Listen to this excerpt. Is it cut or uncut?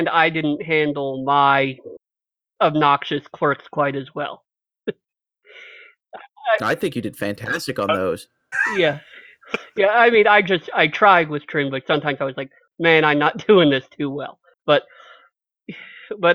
cut